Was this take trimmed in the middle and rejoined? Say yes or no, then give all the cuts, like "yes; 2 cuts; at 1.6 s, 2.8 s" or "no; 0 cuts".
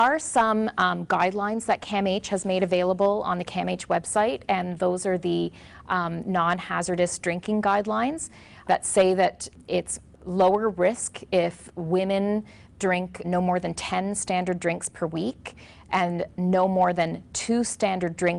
yes; 1 cut; at 13.2 s